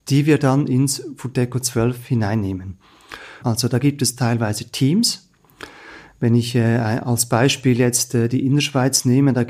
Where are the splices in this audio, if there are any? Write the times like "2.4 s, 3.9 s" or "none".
3.4 s